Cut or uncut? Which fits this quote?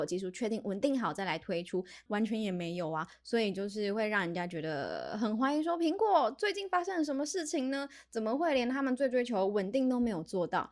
cut